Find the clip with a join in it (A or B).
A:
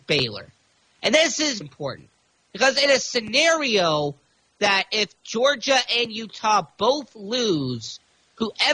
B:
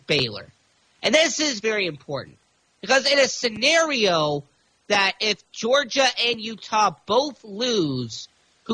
A